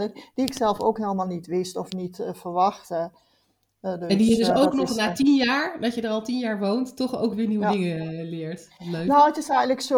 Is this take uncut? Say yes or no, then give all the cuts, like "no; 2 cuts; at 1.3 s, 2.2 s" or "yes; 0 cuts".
yes; 0 cuts